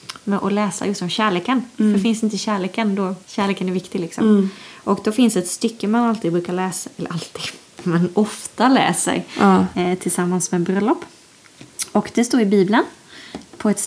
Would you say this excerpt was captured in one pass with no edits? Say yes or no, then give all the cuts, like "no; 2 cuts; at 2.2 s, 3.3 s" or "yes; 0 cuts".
no; 1 cut; at 3.2 s